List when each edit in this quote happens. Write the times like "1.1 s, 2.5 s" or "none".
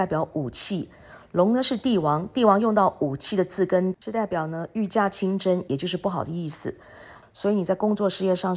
5.7 s, 7.2 s